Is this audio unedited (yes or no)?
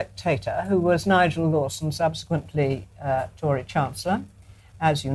yes